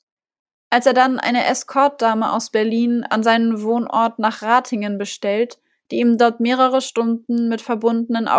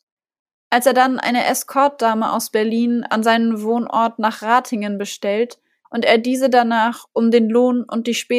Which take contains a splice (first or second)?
second